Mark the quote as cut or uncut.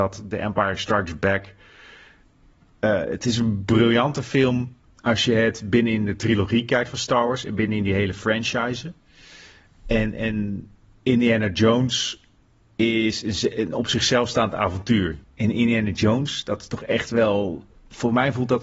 cut